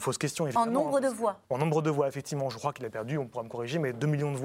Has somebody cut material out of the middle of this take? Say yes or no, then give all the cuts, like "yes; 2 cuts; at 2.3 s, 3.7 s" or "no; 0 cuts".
yes; 1 cut; at 1.4 s